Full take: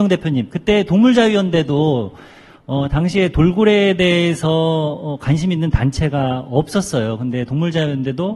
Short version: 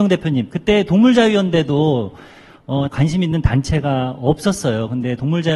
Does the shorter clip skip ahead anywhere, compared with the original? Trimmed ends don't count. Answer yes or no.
yes